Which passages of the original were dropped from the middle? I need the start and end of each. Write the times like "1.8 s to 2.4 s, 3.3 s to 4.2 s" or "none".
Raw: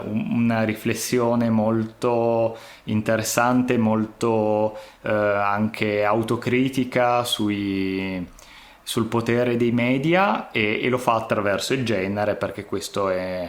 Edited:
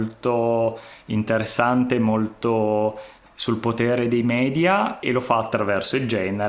5.0 s to 8.7 s, 10.5 s to 10.8 s